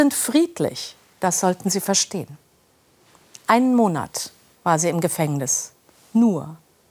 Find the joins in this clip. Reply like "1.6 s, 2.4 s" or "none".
3.4 s